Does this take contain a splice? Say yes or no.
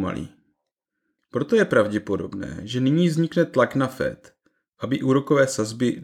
yes